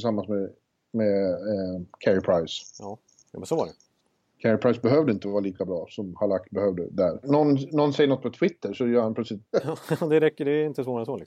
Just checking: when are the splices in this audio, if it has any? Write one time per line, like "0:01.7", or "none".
0:07.2
0:09.5